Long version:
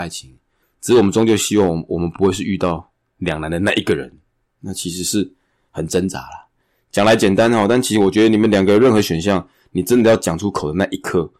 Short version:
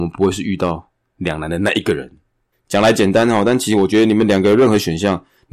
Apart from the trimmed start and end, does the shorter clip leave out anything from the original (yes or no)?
yes